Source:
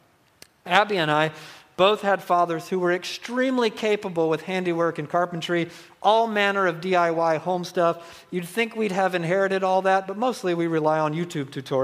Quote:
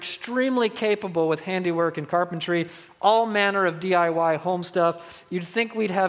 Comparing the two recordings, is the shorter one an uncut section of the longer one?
yes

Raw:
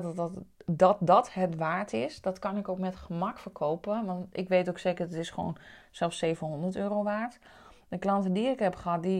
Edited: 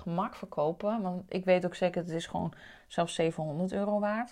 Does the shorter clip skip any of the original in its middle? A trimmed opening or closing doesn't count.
no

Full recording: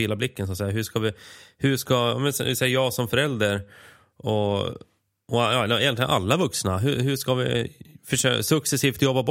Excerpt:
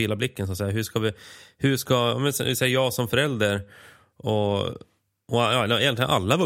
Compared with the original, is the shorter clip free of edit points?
yes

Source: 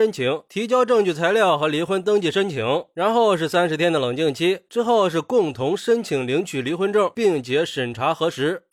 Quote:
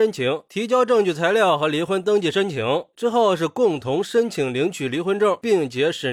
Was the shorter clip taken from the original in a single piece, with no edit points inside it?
no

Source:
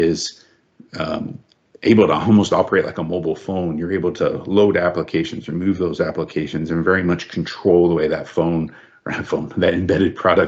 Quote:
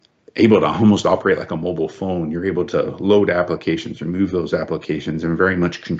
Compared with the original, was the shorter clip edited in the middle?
no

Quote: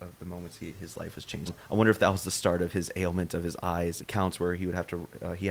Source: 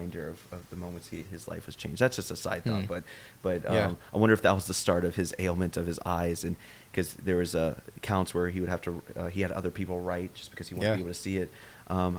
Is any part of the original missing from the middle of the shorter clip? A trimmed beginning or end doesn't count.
yes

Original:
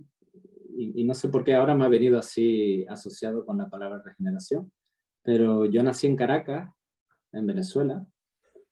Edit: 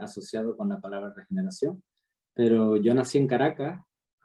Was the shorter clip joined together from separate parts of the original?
no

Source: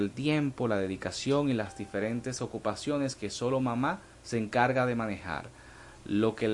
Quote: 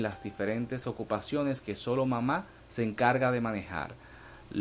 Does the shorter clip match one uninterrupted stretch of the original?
yes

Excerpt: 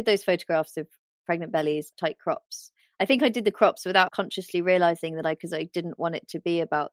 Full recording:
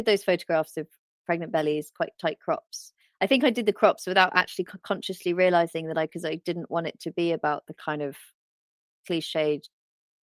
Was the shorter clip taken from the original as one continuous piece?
no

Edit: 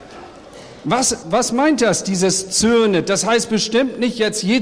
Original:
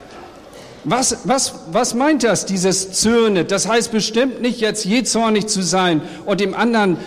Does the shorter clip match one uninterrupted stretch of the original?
no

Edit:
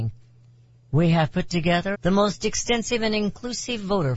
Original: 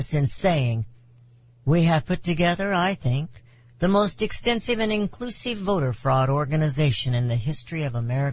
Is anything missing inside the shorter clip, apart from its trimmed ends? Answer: yes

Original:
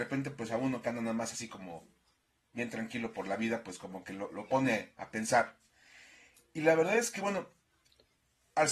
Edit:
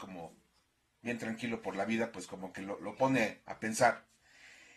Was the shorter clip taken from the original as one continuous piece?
yes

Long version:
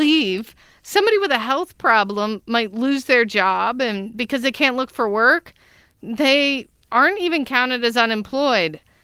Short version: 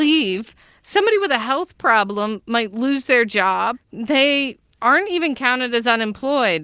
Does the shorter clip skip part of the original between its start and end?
yes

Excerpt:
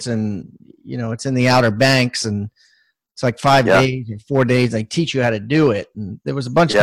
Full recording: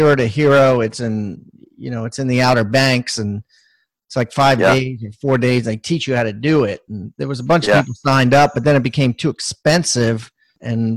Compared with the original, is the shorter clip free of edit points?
yes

